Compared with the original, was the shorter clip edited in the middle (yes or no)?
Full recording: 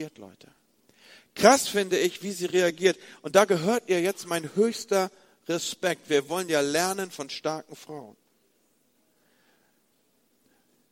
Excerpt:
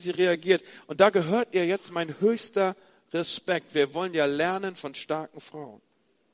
no